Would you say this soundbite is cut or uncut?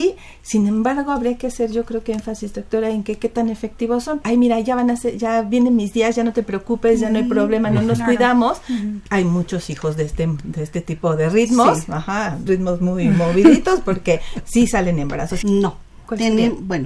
cut